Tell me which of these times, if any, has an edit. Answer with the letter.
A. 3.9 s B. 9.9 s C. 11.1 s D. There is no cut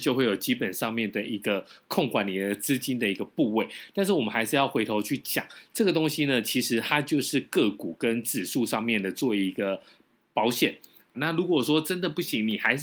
C